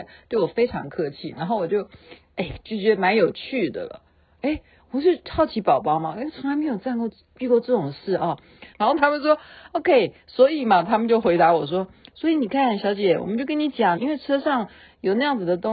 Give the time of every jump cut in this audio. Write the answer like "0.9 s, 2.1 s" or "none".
8.7 s, 14.0 s